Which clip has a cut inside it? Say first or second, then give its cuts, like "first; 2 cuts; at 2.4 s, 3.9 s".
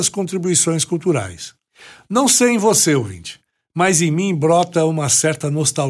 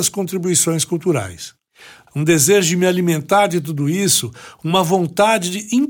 second; 1 cut; at 2.1 s